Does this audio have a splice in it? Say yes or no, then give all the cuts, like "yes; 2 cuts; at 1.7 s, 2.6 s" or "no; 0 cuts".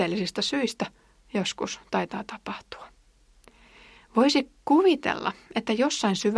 no; 0 cuts